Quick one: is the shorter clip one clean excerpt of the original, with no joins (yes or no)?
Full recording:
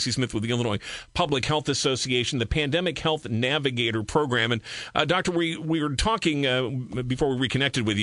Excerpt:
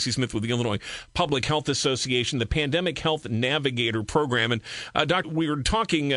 no